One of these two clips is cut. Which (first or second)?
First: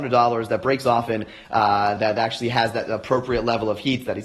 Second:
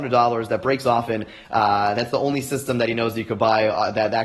first